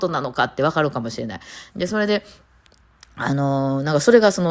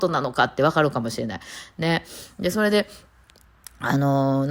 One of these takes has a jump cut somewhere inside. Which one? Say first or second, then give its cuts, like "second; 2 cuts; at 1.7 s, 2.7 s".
first; 1 cut; at 1.7 s